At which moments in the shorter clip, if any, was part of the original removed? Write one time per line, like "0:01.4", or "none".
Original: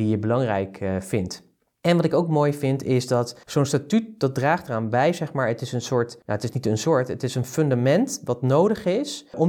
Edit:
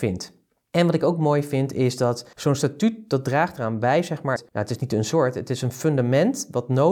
0:04.4